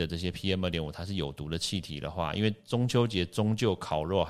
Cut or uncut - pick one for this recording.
uncut